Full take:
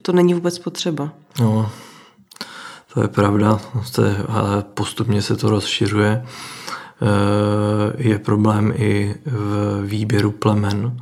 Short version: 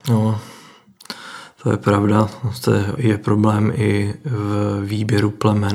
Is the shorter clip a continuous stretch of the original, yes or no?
no